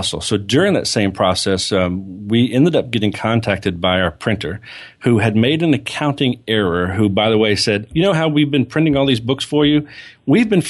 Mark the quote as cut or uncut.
cut